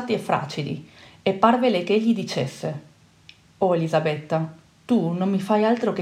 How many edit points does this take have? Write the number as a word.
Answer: zero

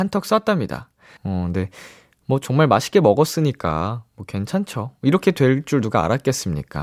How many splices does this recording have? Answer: one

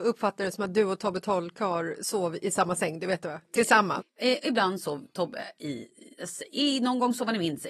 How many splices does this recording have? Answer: one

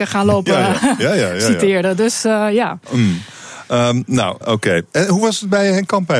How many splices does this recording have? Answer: one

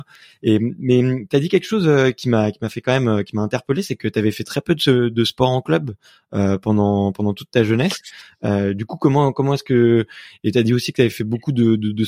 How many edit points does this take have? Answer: zero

